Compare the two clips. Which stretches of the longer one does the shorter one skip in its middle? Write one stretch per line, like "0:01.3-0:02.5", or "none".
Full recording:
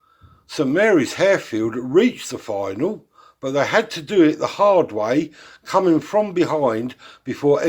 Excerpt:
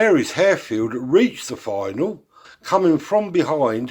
0:03.3-0:05.5